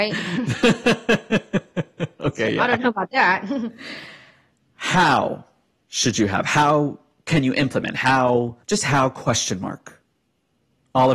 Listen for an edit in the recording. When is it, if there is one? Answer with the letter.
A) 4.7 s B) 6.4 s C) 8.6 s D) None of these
C